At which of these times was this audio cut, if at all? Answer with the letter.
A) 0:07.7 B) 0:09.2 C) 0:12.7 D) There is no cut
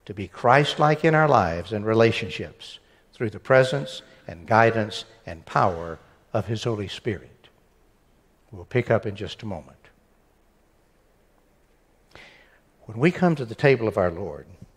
D